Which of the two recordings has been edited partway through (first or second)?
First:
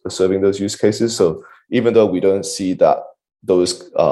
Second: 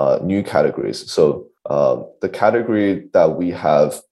second